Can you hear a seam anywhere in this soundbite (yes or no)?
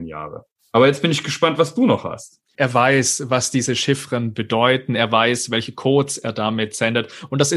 yes